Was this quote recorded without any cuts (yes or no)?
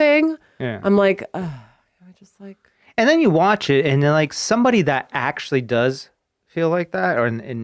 yes